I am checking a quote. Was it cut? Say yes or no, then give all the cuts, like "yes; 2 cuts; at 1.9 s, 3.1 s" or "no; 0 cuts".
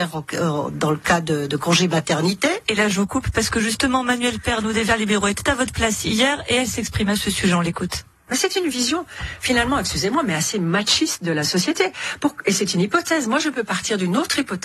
no; 0 cuts